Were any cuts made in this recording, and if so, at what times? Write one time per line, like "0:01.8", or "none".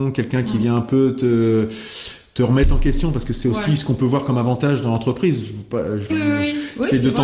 0:06.1

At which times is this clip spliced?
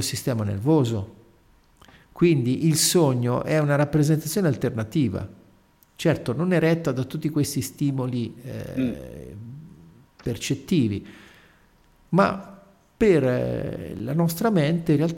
none

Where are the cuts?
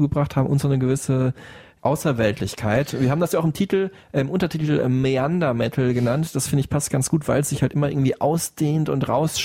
none

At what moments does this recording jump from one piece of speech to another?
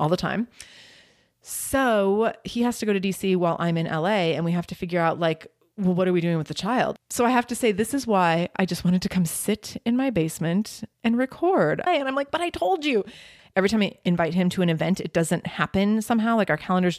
0:07.0
0:11.9
0:13.4

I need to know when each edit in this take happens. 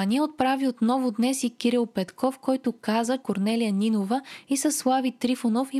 0:03.2

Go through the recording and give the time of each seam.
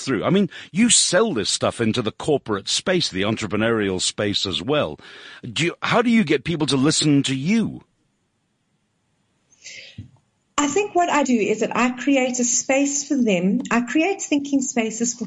0:11.2

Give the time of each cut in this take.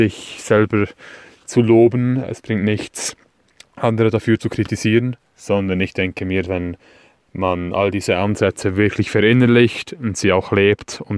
0:05.2
0:06.5

